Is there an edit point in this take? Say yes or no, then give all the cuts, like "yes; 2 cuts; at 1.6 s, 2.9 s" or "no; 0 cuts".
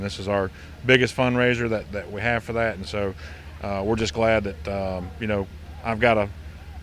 no; 0 cuts